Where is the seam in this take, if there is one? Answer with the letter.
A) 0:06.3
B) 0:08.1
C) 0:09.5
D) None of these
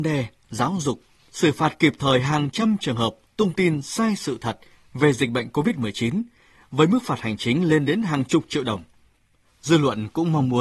C